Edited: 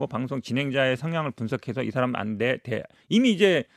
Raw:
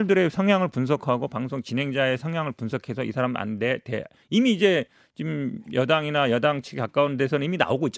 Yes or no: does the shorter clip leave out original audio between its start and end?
no